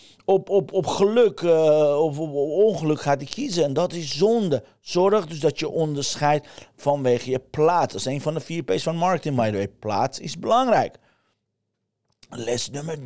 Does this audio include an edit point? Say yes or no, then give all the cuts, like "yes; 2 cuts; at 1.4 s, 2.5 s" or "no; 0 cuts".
no; 0 cuts